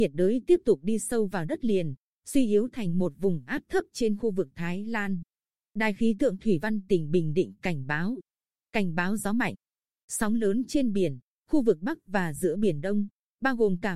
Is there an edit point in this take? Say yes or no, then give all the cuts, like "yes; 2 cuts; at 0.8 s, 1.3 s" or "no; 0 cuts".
no; 0 cuts